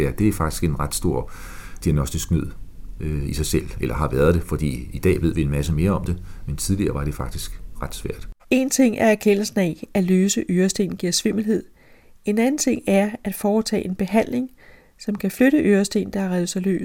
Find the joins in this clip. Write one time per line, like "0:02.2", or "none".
0:08.4